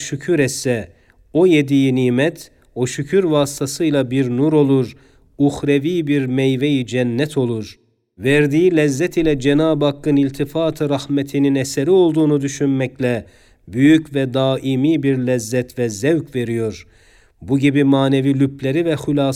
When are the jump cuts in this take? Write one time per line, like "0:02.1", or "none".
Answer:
none

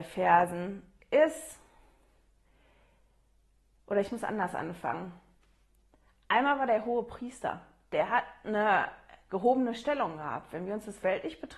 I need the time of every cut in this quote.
none

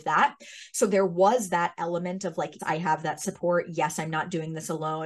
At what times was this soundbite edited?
0:02.6

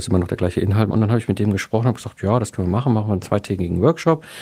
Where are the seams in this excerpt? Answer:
0:00.9

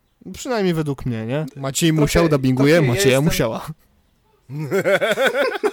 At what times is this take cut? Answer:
0:01.5

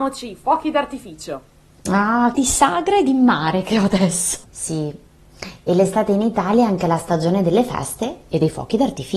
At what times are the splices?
0:02.3
0:04.4

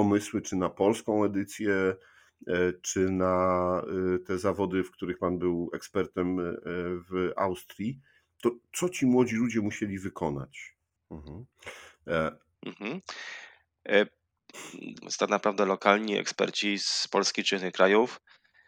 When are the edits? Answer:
0:11.0
0:12.5
0:15.0

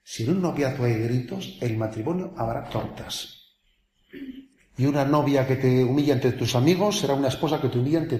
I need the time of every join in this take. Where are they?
0:04.6

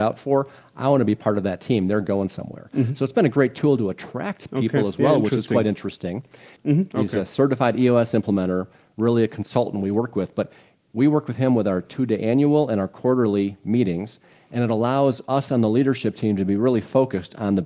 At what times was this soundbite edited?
0:06.6

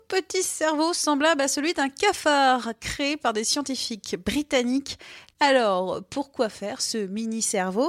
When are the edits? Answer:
0:05.3

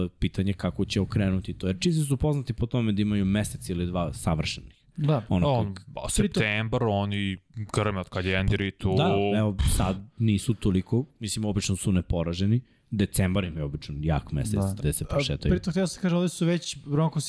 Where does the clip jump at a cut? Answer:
0:14.8

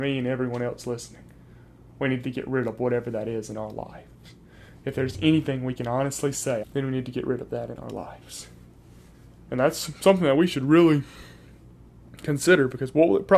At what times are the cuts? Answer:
0:06.6

